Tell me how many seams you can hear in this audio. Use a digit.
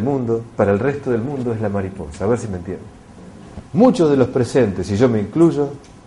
0